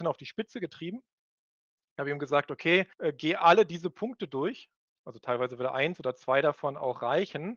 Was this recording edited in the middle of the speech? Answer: yes; 1 cut; at 2.9 s

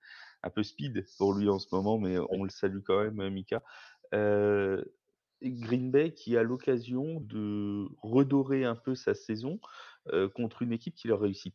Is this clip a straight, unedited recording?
no; 1 cut; at 7.2 s

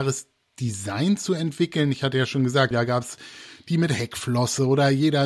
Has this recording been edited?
yes; 1 cut; at 2.7 s

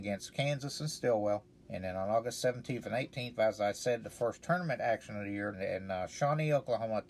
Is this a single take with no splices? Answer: no; 2 cuts; at 1.6 s, 5.5 s

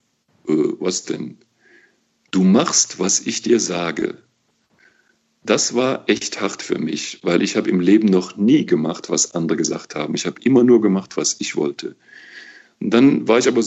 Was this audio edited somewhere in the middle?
no; 0 cuts

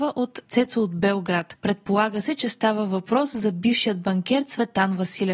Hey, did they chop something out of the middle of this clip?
no; 0 cuts

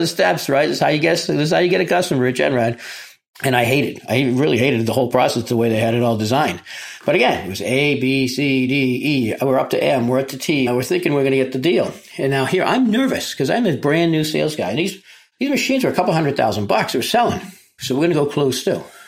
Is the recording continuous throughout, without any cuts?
no; 2 cuts; at 10.7 s, 17.8 s

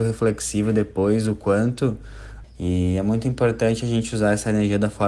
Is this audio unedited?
no; 1 cut; at 2.4 s

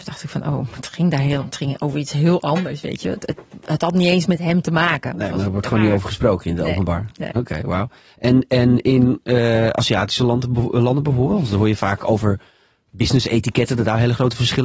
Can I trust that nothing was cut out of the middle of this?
yes; 0 cuts

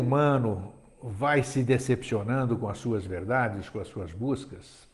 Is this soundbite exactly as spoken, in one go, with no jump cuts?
yes; 0 cuts

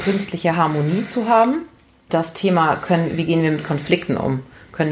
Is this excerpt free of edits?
no; 1 cut; at 2.1 s

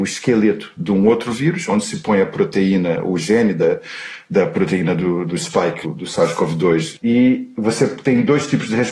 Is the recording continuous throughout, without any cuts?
yes; 0 cuts

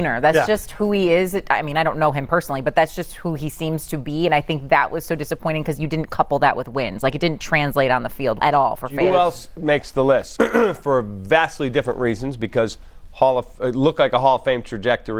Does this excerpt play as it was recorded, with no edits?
no; 2 cuts; at 8.4 s, 10.4 s

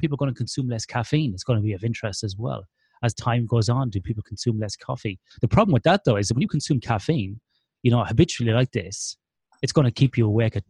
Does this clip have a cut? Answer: yes; 1 cut; at 5.3 s

